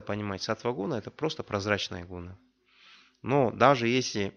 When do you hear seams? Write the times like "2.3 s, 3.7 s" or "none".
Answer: none